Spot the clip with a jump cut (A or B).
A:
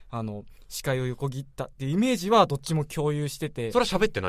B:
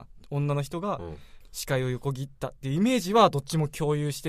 B